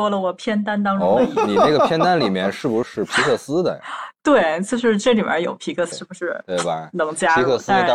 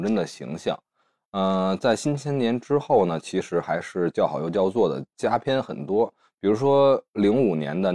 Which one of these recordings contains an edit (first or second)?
first